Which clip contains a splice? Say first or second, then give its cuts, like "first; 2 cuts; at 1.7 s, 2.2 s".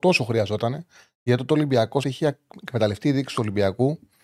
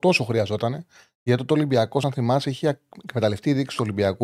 first; 1 cut; at 2.0 s